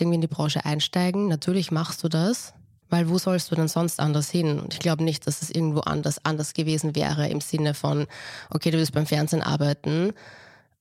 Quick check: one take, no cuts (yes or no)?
yes